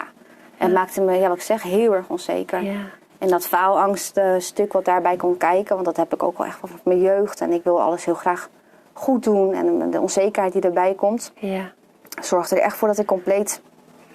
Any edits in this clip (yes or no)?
no